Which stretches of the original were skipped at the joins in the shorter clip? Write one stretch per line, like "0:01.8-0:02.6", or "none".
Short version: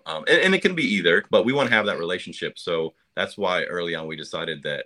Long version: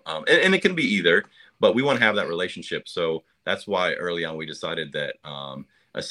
0:01.3-0:01.6